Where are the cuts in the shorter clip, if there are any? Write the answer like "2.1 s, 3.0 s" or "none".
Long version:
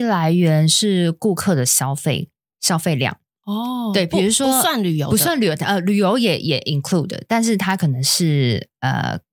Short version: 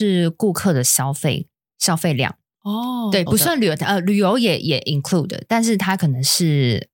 3.3 s